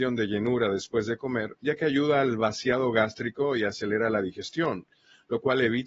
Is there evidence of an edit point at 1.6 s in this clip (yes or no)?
yes